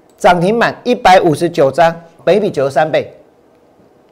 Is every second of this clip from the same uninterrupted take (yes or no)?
no